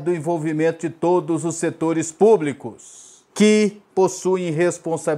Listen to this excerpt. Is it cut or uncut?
cut